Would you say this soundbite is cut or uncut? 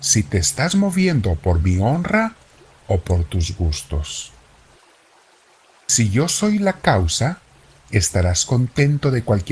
uncut